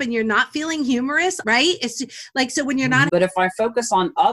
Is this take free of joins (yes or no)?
no